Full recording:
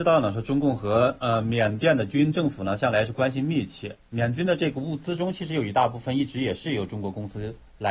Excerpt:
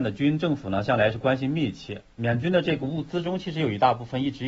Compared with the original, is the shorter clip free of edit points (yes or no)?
yes